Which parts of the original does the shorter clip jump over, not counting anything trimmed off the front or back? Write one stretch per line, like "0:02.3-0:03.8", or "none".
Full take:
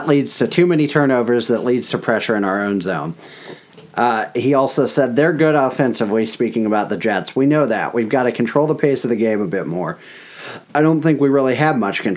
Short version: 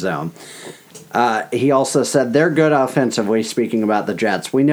none